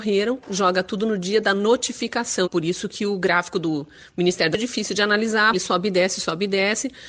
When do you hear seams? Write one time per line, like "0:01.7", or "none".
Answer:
0:02.4
0:05.5